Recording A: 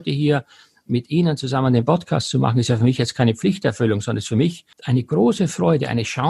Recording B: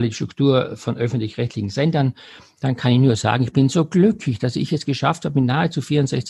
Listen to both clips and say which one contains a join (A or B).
A